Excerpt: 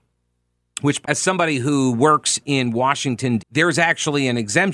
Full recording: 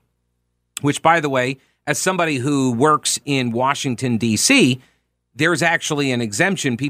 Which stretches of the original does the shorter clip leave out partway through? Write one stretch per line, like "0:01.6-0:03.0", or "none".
0:01.0-0:01.8
0:04.2-0:05.2

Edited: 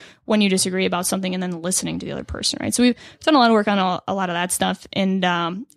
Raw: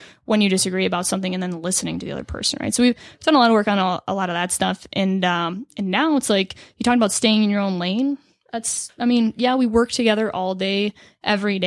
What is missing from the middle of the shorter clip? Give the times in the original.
none

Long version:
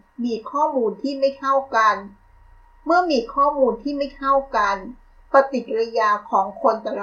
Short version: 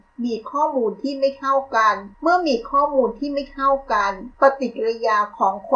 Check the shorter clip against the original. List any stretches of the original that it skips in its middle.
0:02.1-0:02.8
0:05.0-0:05.3

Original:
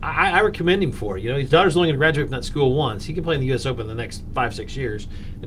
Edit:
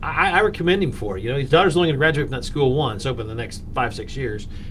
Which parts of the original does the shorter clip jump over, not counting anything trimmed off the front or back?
0:03.0-0:03.6

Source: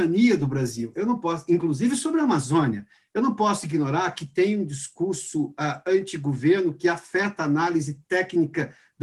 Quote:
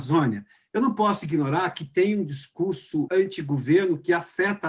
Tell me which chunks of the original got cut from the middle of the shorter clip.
0:05.5-0:05.8

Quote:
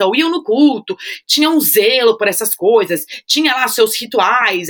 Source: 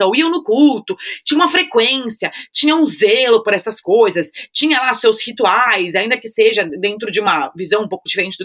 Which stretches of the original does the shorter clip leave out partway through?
0:01.2-0:02.5

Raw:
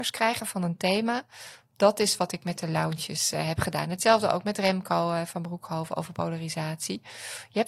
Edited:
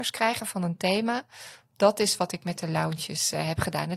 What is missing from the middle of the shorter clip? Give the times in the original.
none

